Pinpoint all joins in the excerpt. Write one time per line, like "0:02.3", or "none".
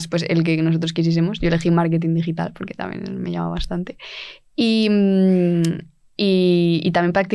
none

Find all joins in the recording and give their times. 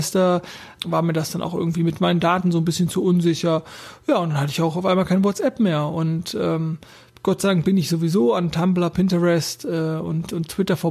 none

